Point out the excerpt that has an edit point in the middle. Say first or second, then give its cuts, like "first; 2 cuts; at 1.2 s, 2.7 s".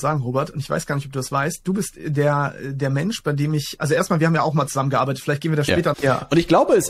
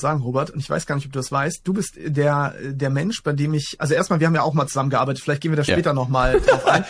first; 1 cut; at 5.9 s